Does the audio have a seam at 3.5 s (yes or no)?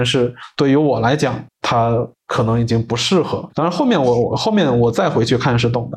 yes